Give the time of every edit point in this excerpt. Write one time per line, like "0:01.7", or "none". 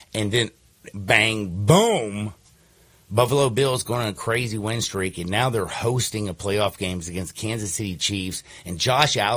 0:00.9